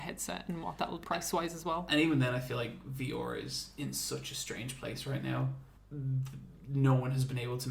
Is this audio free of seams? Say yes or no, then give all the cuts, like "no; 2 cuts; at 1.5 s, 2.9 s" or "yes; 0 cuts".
no; 2 cuts; at 1.0 s, 5.8 s